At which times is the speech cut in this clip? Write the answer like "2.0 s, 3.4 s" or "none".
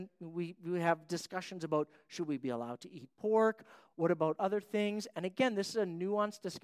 none